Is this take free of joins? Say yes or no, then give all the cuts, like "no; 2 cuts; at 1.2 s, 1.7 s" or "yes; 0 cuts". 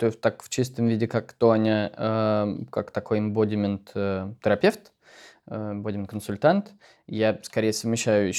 yes; 0 cuts